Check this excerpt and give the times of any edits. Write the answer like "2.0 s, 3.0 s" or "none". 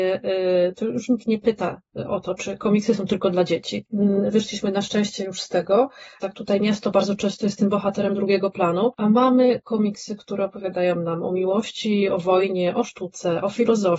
6.2 s